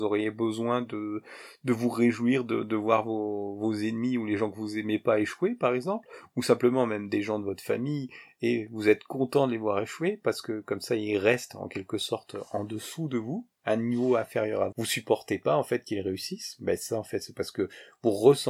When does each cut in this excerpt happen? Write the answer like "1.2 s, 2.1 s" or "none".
13.5 s, 14.7 s

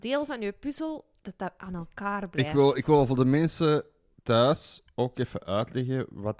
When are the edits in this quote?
none

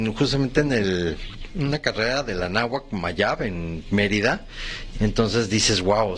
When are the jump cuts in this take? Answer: 4.9 s

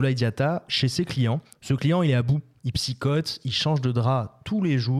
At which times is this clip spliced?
1.5 s

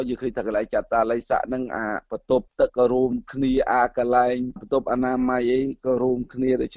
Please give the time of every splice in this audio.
2.7 s

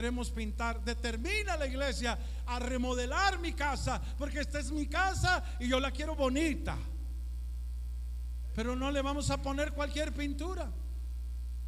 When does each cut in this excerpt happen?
8.5 s

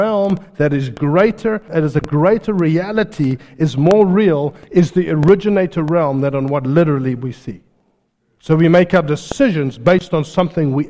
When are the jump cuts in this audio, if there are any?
none

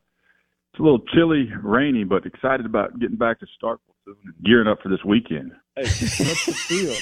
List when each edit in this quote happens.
4.4 s, 5.7 s

